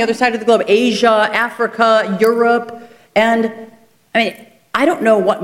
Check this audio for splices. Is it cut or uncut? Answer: uncut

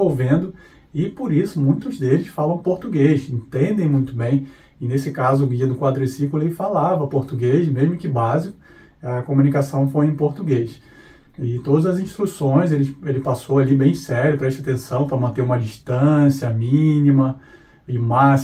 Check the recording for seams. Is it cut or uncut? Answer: uncut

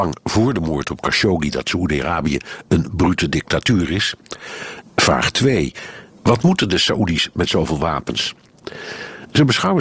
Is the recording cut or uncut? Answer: cut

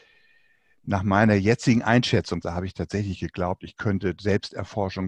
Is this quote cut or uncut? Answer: cut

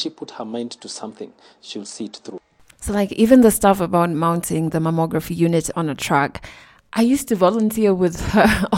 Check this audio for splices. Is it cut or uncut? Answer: uncut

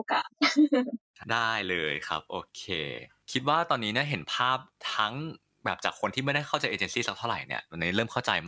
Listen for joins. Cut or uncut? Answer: uncut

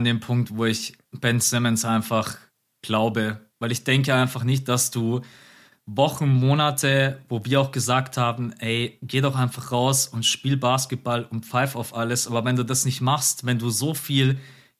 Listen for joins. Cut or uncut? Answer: uncut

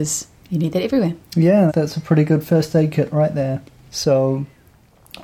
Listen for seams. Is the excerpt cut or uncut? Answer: cut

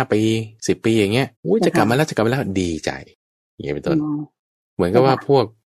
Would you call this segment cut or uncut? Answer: cut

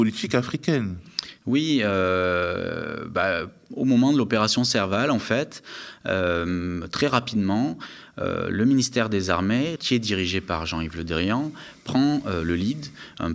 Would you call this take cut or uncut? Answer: cut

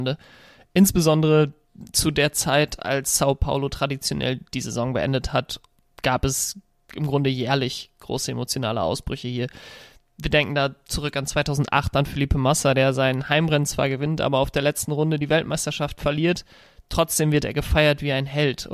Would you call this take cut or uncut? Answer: uncut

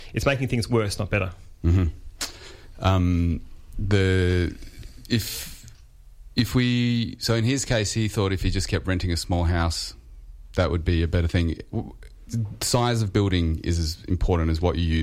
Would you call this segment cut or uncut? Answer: uncut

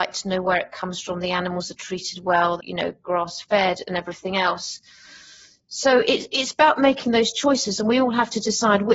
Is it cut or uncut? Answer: cut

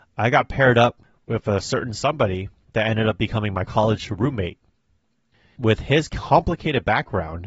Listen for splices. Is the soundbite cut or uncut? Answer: uncut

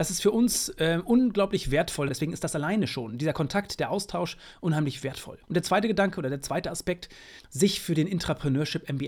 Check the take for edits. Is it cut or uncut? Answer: cut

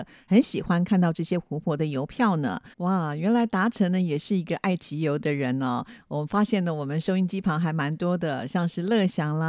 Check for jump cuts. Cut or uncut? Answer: cut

